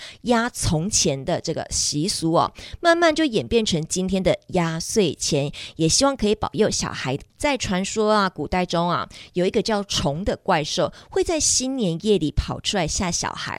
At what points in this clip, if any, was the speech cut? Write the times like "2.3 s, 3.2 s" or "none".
7.3 s